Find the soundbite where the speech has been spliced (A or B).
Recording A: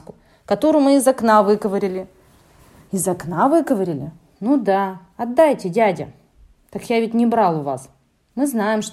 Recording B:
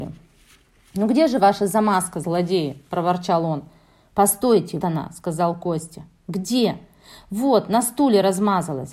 B